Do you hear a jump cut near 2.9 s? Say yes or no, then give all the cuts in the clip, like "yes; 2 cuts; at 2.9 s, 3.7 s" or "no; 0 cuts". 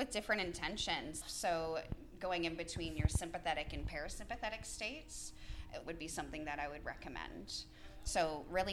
no; 2 cuts; at 1.2 s, 5.9 s